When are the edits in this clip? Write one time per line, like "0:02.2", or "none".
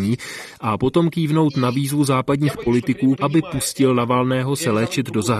0:03.2